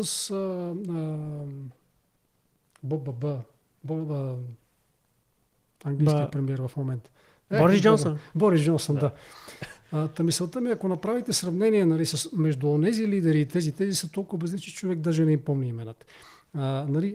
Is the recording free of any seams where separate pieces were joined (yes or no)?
yes